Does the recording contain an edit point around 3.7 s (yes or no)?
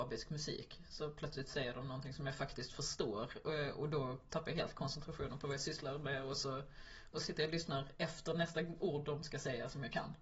no